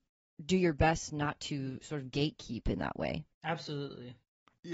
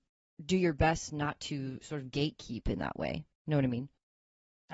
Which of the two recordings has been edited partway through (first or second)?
first